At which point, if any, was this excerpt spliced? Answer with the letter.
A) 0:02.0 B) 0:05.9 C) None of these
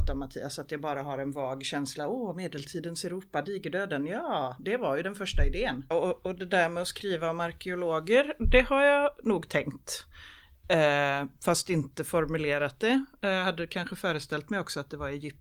B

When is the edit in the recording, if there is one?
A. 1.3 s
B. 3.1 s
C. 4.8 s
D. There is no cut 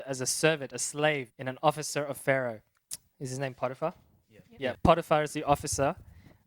A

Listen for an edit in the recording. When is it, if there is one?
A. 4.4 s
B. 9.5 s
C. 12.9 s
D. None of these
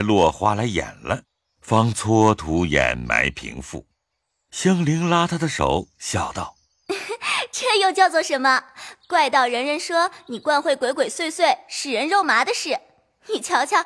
D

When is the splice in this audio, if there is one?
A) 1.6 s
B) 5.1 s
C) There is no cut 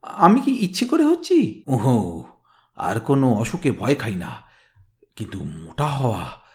A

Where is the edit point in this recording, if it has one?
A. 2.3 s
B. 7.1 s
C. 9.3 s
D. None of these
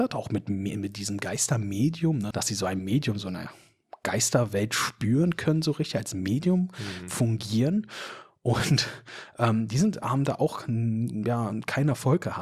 A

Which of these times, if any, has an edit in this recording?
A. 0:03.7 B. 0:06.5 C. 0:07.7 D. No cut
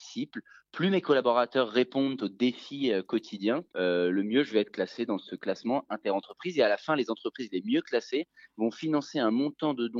A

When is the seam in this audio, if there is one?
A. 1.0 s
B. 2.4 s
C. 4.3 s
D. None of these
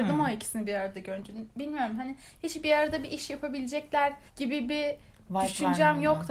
C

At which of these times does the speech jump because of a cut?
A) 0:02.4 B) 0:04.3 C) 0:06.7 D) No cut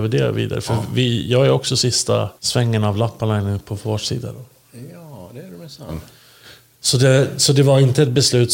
A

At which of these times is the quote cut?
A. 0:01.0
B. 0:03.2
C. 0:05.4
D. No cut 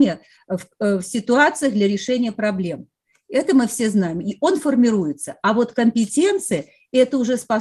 D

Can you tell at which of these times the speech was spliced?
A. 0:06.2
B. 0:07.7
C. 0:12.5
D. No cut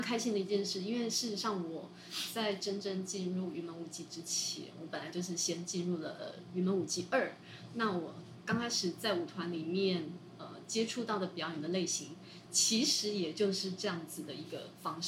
D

